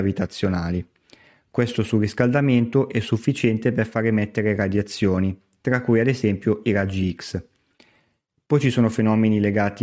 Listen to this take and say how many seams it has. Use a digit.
0